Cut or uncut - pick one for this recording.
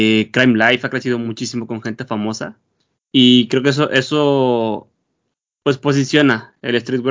cut